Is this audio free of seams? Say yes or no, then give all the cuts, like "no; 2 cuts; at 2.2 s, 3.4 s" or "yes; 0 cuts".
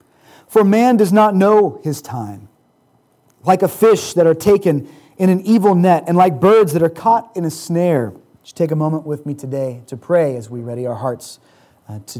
no; 1 cut; at 8.4 s